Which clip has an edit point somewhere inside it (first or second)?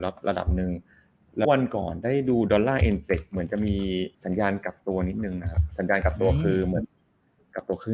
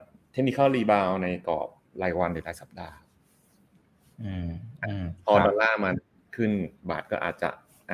first